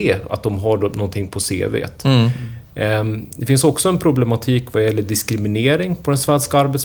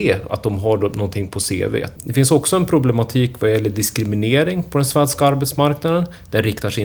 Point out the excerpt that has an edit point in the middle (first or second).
second